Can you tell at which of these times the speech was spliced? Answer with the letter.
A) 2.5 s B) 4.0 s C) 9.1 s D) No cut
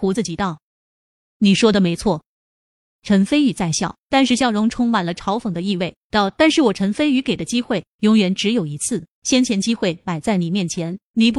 D